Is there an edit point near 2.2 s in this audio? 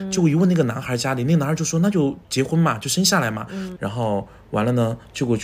yes; 2 cuts; at 2.2 s, 3.8 s

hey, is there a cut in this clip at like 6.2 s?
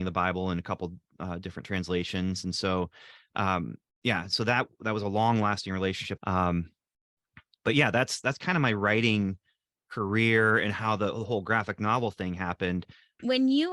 yes; 1 cut; at 6.2 s

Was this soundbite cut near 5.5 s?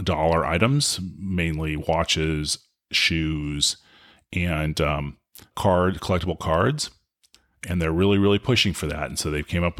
yes; 1 cut; at 5.5 s

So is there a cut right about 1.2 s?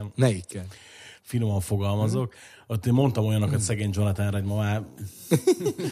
yes; 1 cut; at 1.2 s

